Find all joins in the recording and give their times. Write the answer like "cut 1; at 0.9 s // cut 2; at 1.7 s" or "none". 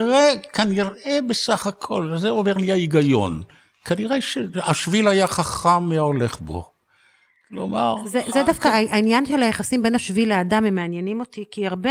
none